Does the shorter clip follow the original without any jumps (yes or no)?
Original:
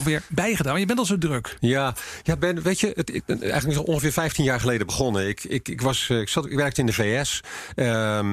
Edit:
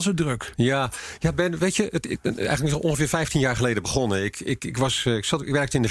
yes